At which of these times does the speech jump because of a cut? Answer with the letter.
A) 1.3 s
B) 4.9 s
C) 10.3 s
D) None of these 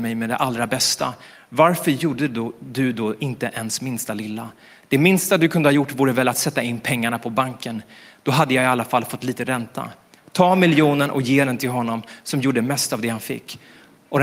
D